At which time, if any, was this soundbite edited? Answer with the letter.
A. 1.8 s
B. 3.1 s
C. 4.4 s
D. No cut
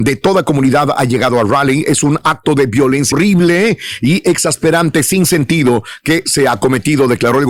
B